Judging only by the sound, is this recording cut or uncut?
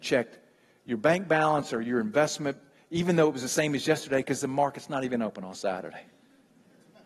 uncut